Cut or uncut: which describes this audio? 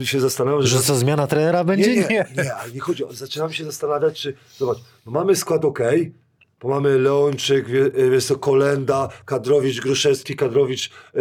uncut